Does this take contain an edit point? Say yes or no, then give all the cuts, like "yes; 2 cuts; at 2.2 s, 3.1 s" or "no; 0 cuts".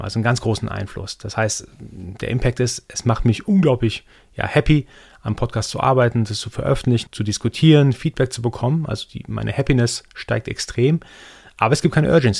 yes; 1 cut; at 7.1 s